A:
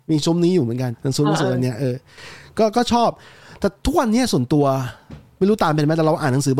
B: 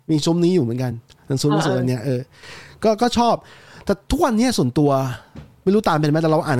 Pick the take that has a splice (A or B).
A